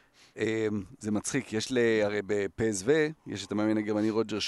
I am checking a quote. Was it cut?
no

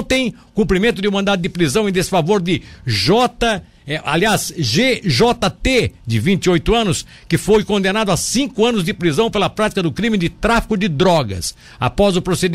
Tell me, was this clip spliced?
no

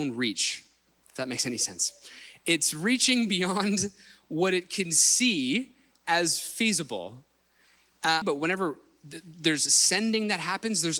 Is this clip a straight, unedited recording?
no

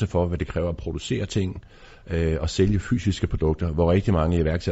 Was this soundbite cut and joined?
no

